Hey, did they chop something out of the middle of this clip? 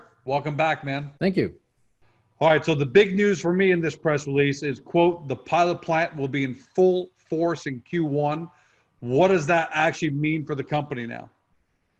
yes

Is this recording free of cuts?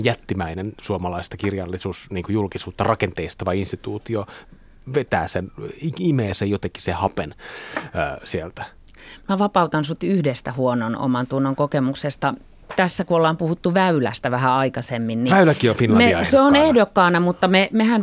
yes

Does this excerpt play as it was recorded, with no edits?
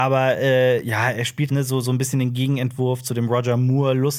no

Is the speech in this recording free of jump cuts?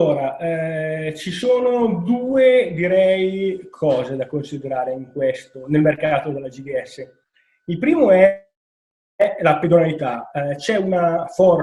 yes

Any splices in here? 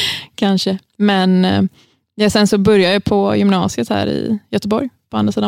no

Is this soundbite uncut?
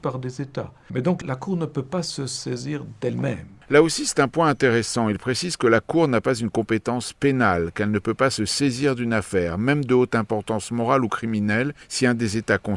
yes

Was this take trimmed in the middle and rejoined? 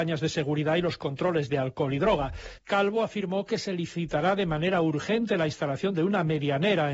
yes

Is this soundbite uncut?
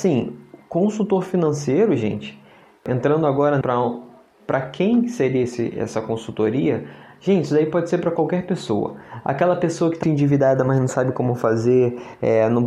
no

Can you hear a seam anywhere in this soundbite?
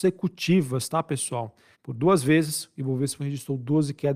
yes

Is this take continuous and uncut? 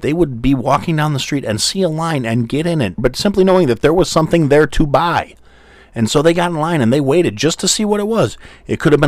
no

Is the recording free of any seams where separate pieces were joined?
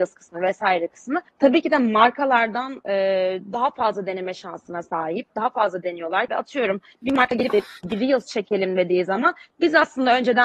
no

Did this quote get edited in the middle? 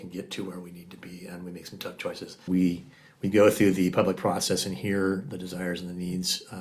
yes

